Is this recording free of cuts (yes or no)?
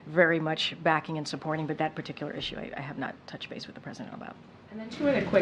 yes